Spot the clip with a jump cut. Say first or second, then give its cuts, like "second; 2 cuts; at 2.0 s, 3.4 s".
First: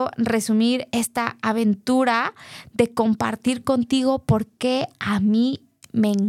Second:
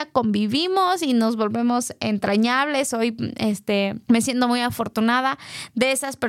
second; 1 cut; at 4.0 s